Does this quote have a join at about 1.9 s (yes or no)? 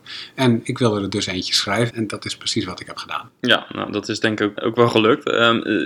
yes